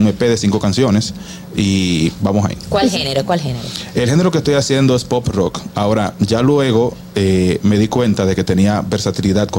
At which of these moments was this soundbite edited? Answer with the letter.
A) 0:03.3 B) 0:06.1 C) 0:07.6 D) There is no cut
D